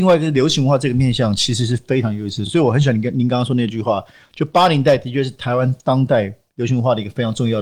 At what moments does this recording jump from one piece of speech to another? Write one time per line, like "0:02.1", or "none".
none